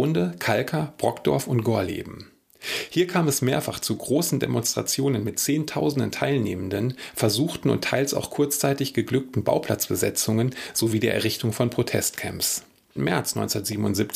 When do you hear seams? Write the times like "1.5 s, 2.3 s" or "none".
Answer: 13.0 s